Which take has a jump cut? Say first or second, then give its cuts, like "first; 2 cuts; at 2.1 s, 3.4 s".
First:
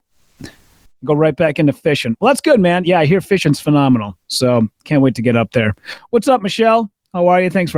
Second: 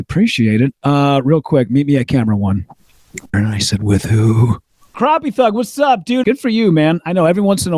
second; 3 cuts; at 3.3 s, 4.9 s, 6.2 s